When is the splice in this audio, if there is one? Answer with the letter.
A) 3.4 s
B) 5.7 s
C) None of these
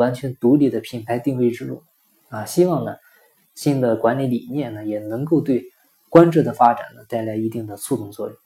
A